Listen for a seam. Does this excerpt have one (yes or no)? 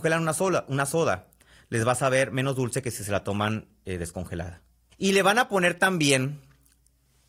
yes